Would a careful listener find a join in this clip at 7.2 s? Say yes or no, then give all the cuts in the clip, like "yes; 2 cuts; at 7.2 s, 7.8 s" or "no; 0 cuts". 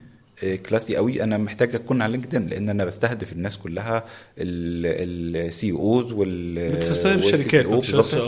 no; 0 cuts